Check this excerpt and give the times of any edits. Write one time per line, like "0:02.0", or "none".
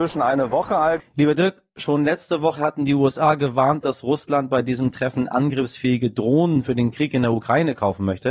0:01.0